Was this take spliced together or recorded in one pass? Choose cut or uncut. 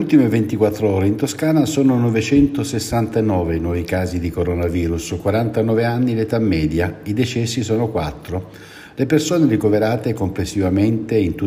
uncut